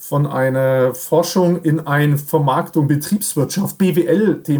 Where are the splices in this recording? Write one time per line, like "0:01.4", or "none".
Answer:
none